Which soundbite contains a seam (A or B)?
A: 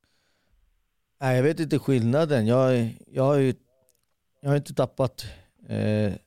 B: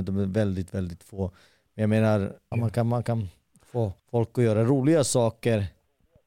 B